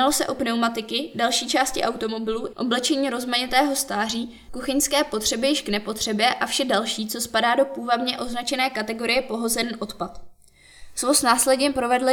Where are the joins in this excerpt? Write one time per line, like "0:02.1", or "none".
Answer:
0:02.5
0:04.5